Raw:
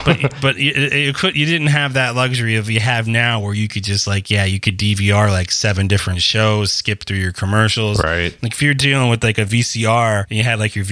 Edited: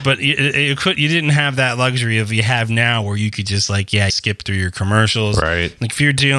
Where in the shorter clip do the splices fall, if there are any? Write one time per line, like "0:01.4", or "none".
0:04.1